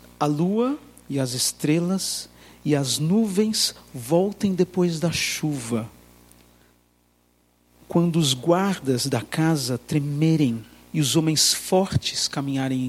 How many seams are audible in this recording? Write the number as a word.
zero